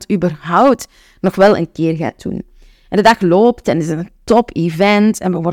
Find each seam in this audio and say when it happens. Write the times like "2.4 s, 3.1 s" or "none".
none